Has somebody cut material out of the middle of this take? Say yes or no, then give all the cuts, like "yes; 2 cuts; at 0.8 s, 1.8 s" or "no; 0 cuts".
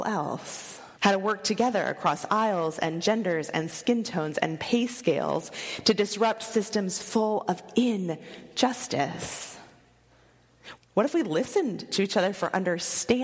yes; 2 cuts; at 1.0 s, 10.8 s